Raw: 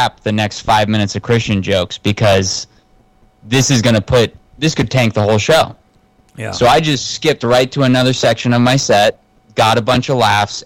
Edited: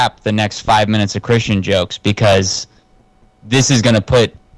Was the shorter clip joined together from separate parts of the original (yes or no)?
no